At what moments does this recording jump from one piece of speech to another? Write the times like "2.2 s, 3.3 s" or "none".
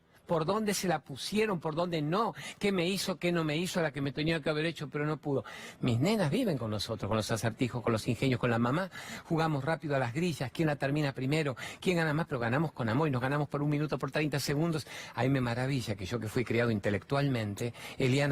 5.8 s

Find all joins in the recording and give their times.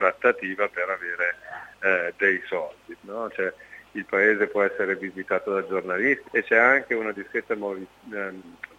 3.0 s, 6.2 s

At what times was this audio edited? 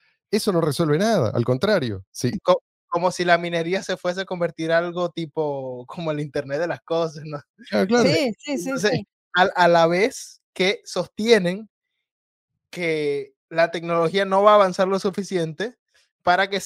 2.3 s

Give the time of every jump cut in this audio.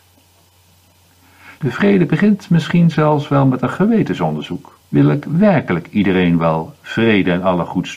1.6 s, 4.8 s

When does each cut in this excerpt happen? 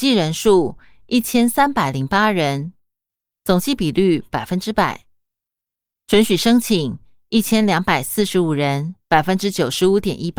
9.0 s

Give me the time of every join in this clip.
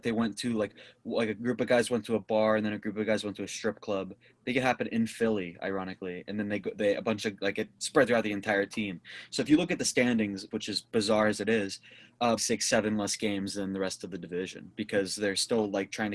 10.5 s, 12.4 s

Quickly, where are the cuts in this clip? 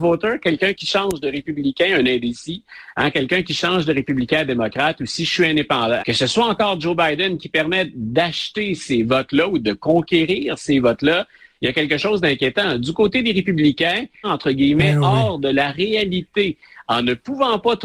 6.0 s, 14.2 s

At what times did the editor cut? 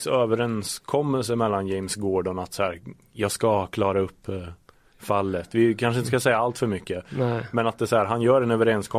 none

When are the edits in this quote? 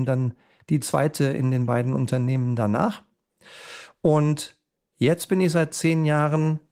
none

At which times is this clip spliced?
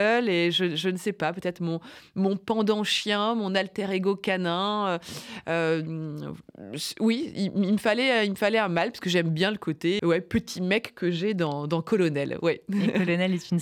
10.0 s

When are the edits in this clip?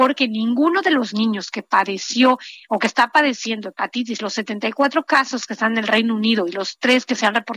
none

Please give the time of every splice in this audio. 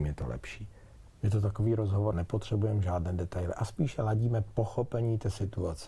1.1 s, 2.1 s

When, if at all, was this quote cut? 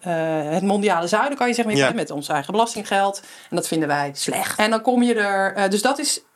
1.9 s, 4.6 s

